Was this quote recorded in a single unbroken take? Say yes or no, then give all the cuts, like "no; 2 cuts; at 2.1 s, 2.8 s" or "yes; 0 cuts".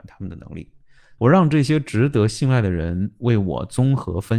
no; 1 cut; at 1.2 s